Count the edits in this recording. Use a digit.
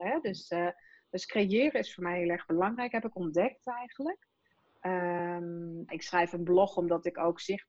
1